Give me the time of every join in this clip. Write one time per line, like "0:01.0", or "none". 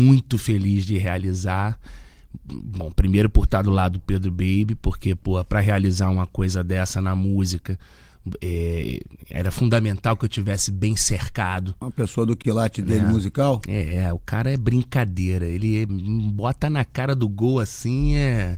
0:15.9

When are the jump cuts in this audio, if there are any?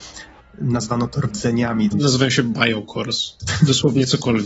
0:01.9
0:03.4

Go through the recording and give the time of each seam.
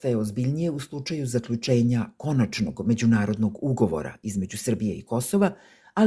none

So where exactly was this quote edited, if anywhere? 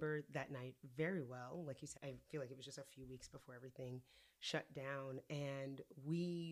0:02.0

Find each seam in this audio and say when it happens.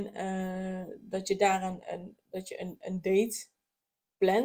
none

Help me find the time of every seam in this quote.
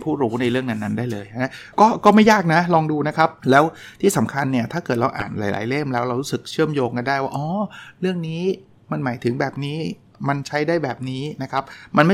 0:01.7
0:03.4

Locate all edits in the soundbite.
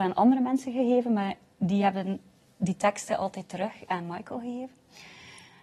none

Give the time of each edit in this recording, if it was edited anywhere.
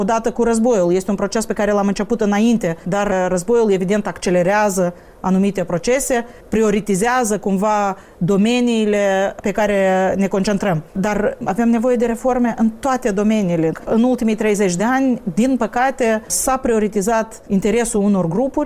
none

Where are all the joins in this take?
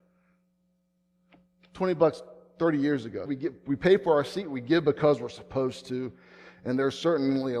0:03.3

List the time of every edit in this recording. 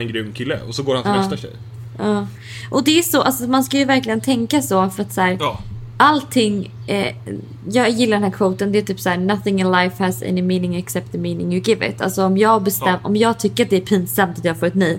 none

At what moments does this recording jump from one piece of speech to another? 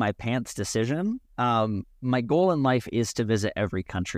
none

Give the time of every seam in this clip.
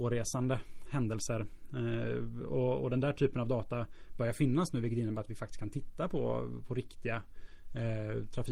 none

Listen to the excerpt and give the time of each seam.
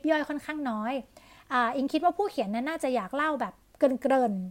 none

